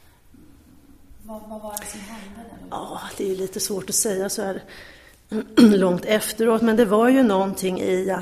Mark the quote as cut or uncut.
uncut